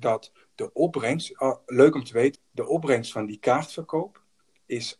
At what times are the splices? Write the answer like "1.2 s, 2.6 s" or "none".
2.3 s